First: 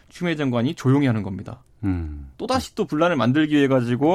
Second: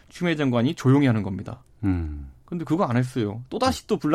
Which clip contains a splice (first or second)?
first